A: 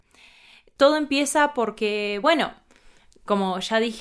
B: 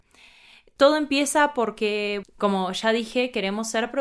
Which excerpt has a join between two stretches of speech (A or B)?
B